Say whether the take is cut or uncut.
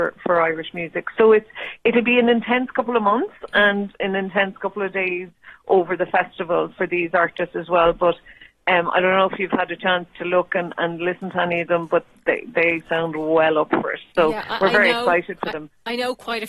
uncut